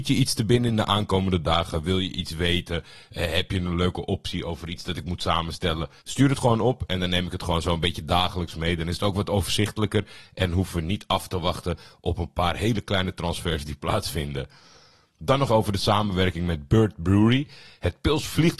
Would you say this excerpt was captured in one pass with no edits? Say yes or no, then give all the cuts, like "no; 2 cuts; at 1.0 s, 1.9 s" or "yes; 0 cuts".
no; 2 cuts; at 6.0 s, 15.5 s